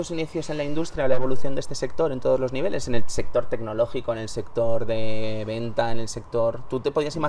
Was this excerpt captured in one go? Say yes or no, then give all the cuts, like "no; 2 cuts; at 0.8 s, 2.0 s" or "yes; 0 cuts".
yes; 0 cuts